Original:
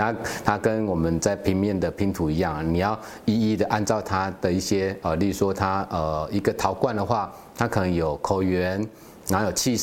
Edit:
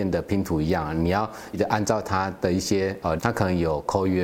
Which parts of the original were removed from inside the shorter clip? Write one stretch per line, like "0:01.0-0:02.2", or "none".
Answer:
0:03.2-0:03.5
0:05.2-0:07.5

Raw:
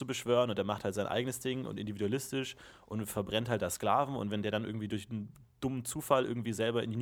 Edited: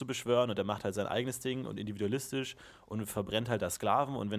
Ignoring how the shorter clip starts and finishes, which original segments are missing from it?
none

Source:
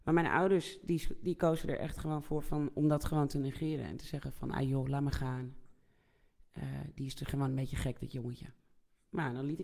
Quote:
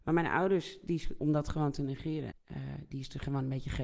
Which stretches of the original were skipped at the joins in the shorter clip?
0:01.2-0:02.7
0:03.9-0:06.4

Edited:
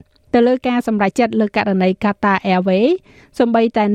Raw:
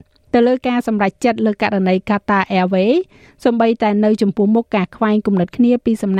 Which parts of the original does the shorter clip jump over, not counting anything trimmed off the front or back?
0:01.1-0:01.2

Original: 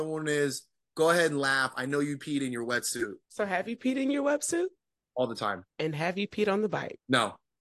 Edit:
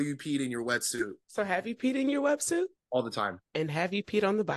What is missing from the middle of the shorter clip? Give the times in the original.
0:04.8-0:05.0

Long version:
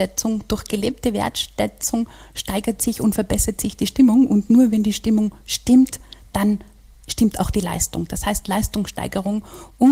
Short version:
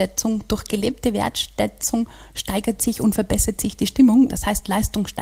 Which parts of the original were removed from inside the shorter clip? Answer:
0:04.3-0:08.1

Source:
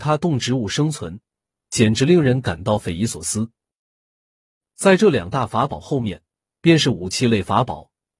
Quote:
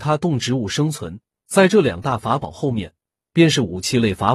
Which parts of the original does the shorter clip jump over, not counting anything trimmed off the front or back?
0:01.4-0:04.7

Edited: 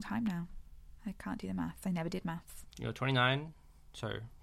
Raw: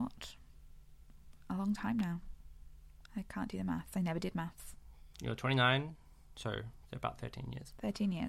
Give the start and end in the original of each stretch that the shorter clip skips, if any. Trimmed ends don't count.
0:02.7-0:03.1
0:04.8-0:05.1

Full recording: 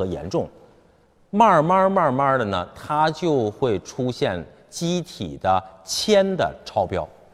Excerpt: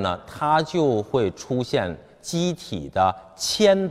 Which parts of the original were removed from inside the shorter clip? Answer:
none

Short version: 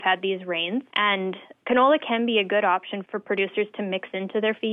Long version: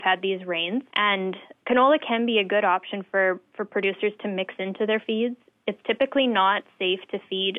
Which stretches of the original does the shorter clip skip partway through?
0:03.1-0:03.5

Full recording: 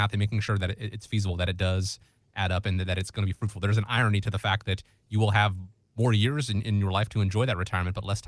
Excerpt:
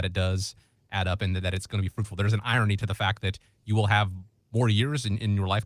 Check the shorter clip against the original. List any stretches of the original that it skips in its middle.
none

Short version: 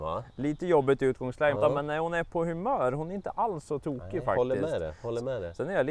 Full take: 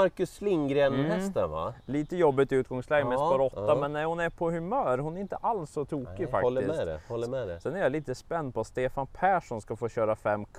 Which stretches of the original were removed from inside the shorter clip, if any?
0:03.0-0:03.6

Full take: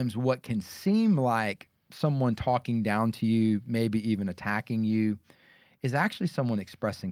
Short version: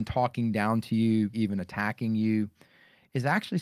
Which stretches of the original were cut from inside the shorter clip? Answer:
0:03.6-0:04.0

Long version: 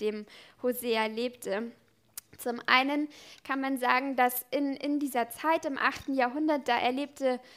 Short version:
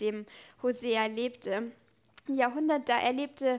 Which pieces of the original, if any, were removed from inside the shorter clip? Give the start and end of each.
0:02.3-0:06.0

